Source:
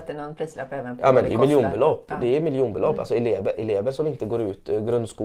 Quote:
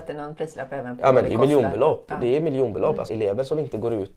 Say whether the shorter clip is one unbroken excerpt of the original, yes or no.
no